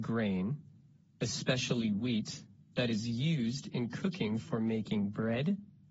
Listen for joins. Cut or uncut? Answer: uncut